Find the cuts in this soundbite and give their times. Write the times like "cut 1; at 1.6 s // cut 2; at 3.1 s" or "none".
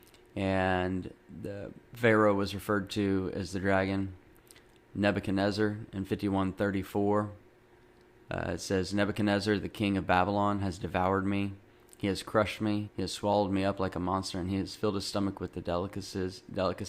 cut 1; at 12.8 s